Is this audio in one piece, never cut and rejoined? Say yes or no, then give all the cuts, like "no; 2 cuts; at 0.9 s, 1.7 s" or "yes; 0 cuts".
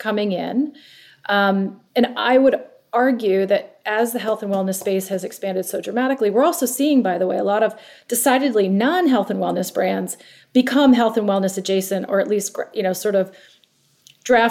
yes; 0 cuts